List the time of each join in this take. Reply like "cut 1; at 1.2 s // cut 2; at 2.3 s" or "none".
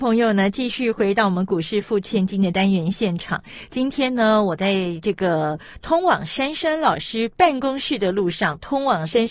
none